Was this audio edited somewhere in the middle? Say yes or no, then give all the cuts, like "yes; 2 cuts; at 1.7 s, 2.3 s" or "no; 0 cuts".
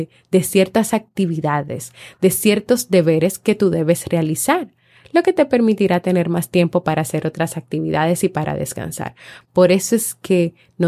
yes; 1 cut; at 9.4 s